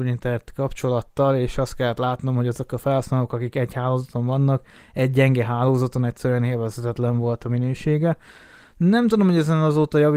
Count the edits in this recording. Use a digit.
0